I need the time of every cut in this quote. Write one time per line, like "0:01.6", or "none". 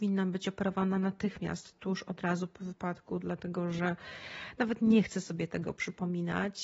none